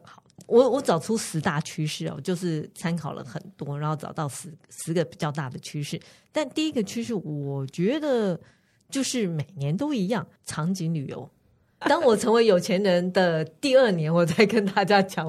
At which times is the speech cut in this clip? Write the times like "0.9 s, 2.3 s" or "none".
11.8 s